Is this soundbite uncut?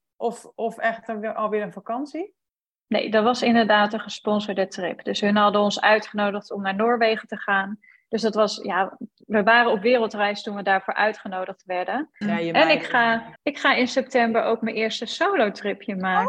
no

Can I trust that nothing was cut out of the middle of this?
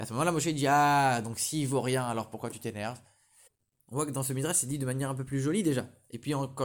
yes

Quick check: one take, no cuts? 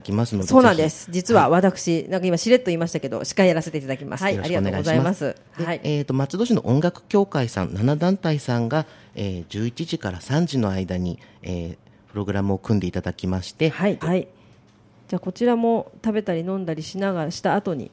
no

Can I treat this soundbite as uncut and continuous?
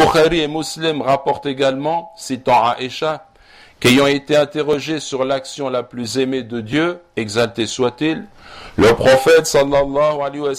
yes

